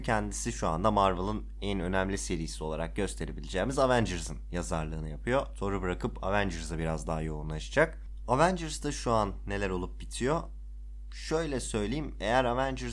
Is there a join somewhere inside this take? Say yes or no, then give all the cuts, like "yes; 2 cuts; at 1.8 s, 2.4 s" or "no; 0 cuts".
no; 0 cuts